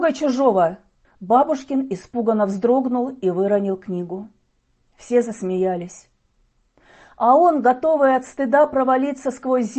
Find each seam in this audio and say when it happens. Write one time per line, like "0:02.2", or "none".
0:01.0